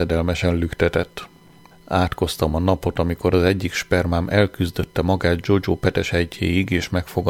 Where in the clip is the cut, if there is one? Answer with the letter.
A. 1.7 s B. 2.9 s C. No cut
A